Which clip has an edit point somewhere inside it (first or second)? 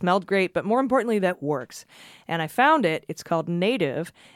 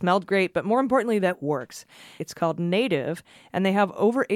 second